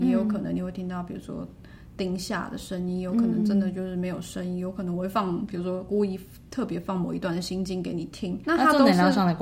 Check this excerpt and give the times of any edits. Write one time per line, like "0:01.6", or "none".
0:08.4